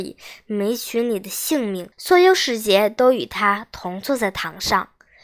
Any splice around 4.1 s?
no; 1 cut; at 1.9 s

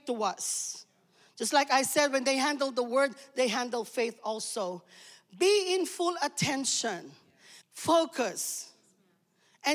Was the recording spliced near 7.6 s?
yes; 1 cut; at 7.6 s

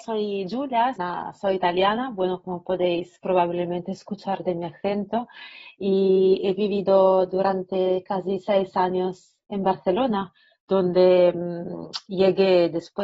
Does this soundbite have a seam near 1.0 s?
yes; 1 cut; at 1.0 s

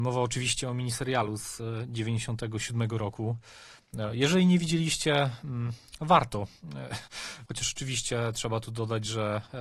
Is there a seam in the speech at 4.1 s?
no; 1 cut; at 7.5 s

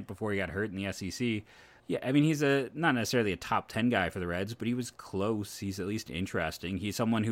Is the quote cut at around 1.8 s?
yes; 1 cut; at 1.8 s

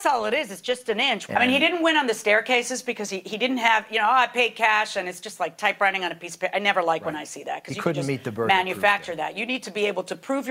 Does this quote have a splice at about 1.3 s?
yes; 1 cut; at 1.3 s

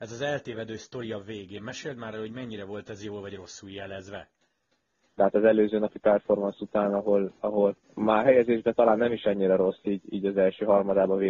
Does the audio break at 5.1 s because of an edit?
yes; 2 cuts; at 5.1 s, 7.8 s

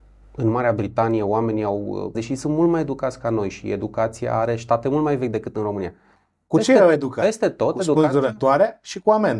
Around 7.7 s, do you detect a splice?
no; 1 cut; at 2.1 s

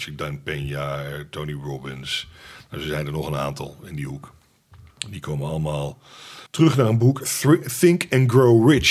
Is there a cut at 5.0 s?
no; 1 cut; at 6.5 s

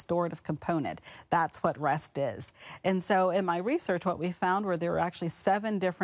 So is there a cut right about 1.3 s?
no; 0 cuts

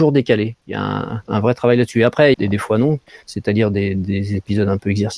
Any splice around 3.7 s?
no; 2 cuts; at 1.3 s, 2.3 s

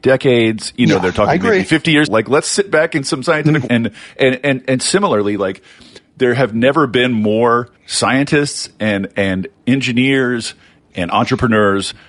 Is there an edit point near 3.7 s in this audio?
yes; 3 cuts; at 2.1 s, 3.7 s, 7.8 s

